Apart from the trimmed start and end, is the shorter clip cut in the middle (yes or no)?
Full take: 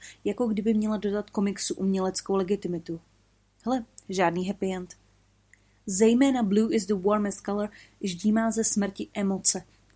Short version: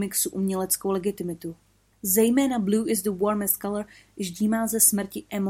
yes